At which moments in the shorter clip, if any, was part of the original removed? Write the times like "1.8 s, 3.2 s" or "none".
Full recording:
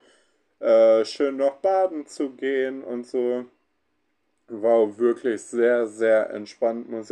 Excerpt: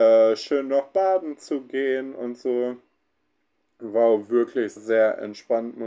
4.8 s